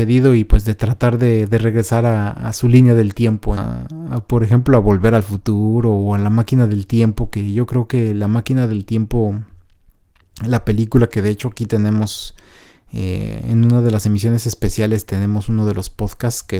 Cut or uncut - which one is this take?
cut